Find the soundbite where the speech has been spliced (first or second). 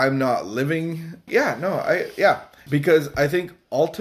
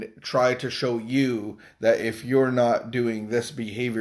first